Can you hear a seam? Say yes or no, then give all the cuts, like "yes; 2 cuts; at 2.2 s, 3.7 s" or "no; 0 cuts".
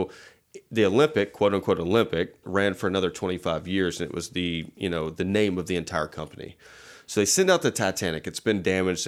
yes; 1 cut; at 2.4 s